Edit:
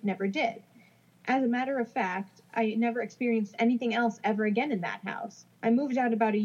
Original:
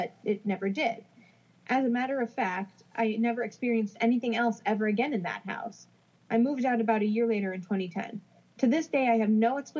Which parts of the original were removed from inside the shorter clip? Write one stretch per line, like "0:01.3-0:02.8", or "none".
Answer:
0:06.0-0:06.2